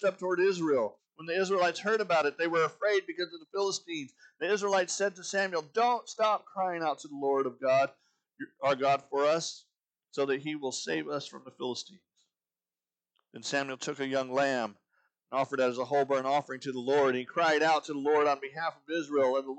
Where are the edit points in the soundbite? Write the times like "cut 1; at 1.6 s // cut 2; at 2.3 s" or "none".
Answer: none